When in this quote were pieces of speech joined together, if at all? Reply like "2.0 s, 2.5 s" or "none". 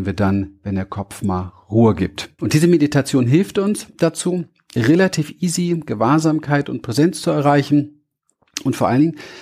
2.4 s